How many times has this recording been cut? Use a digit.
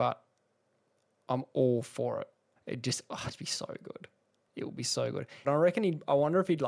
2